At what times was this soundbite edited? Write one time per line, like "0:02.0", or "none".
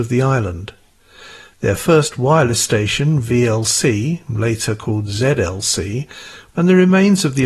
0:06.5